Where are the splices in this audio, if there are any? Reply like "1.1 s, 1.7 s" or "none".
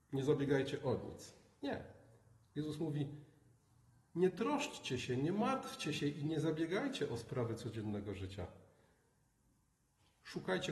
none